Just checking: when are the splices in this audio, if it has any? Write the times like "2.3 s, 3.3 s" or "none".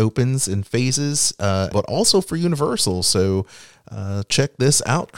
1.7 s